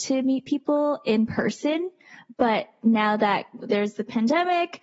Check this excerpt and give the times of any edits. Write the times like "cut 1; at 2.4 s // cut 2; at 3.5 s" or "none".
none